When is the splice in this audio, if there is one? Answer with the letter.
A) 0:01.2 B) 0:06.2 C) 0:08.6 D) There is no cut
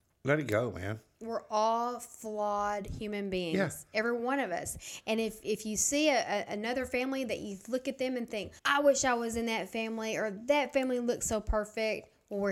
C